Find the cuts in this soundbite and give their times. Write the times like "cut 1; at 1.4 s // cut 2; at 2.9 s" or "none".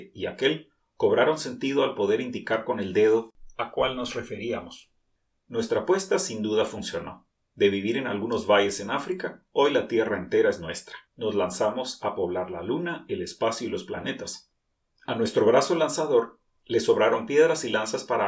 cut 1; at 11.1 s // cut 2; at 14.9 s

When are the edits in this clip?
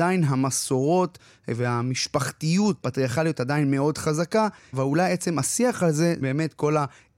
cut 1; at 2.8 s // cut 2; at 4.7 s // cut 3; at 6.2 s

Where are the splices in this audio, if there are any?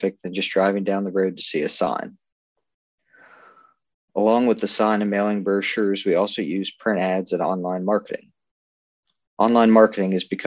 none

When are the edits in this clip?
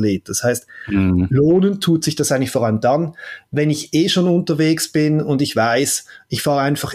none

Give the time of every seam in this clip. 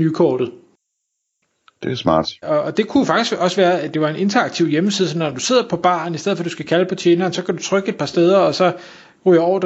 cut 1; at 2.4 s

